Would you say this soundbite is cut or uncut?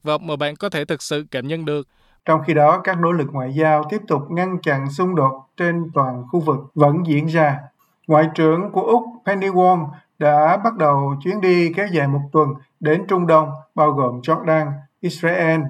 uncut